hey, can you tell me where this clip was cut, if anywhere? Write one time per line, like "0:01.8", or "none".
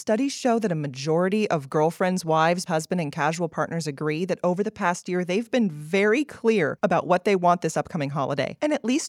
0:02.7